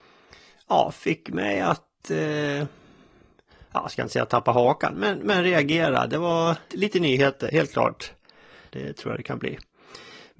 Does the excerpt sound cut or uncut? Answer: cut